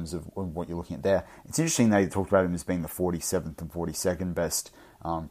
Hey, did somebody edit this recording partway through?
no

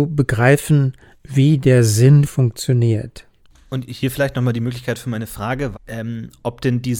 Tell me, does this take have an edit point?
yes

